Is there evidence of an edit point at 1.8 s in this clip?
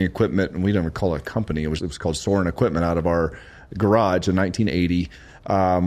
yes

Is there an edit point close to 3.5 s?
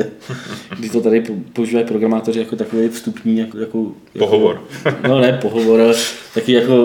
yes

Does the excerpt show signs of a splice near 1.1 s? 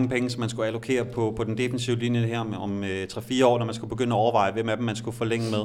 no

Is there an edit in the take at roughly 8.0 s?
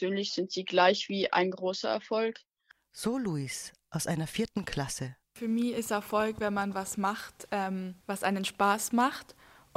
yes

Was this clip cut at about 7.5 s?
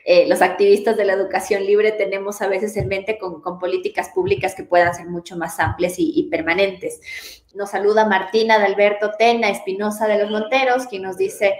yes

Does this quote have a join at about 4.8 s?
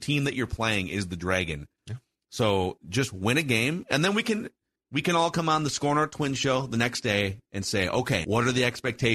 yes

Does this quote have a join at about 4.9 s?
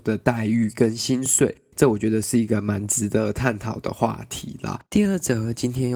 yes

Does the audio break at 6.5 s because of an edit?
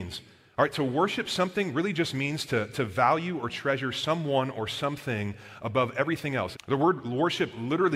yes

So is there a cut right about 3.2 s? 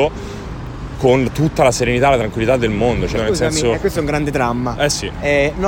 yes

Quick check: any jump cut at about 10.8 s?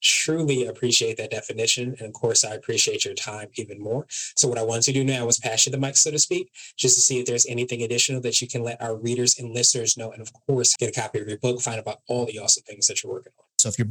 yes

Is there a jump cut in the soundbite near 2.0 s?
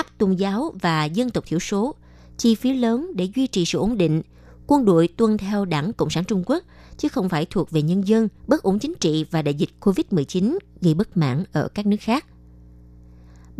no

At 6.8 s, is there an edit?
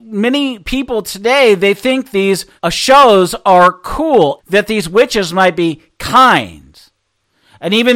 no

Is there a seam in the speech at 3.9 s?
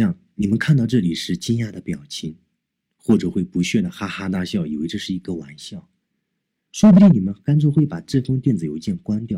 no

